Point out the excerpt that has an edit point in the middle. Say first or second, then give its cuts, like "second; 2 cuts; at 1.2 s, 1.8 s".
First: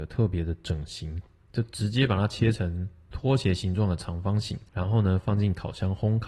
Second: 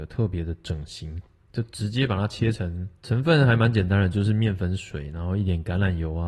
second; 1 cut; at 3.0 s